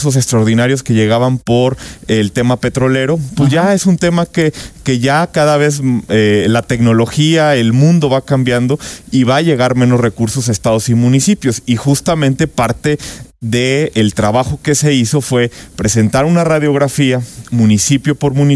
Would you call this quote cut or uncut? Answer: uncut